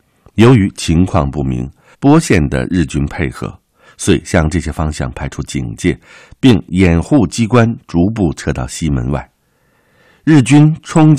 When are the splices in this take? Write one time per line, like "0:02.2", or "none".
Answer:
0:01.9